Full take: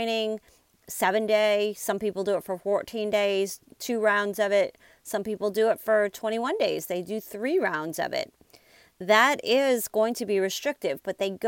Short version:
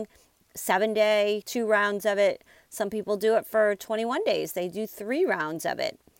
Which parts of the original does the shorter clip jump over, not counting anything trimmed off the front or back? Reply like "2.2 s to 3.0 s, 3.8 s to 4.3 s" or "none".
1.7 s to 3.8 s